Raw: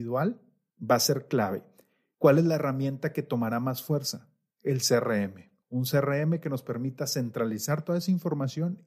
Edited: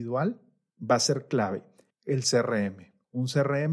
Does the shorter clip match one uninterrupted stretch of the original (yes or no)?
no